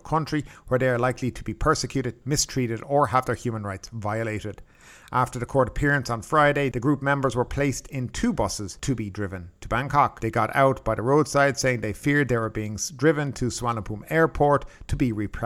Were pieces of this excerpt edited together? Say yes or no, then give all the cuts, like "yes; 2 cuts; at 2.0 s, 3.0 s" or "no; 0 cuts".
yes; 2 cuts; at 2.2 s, 10.2 s